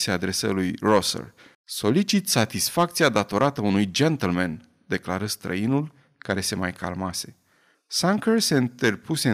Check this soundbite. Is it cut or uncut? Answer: cut